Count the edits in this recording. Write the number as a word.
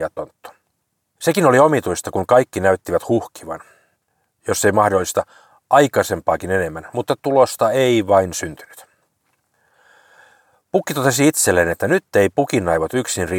one